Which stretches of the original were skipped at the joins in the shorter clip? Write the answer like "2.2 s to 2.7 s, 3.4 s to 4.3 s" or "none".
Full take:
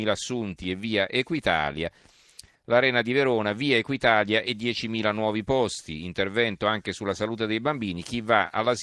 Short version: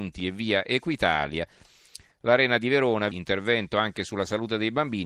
3.5 s to 6.0 s